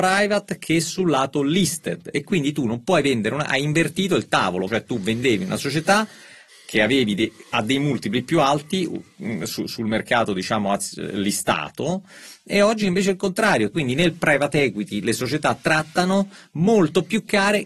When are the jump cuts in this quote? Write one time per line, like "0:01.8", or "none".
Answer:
0:04.7
0:13.7